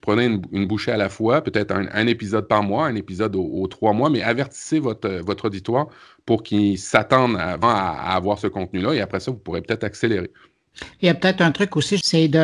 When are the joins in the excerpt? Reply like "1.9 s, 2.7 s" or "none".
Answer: 7.6 s